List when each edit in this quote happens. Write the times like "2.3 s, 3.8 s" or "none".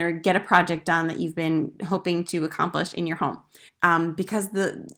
3.7 s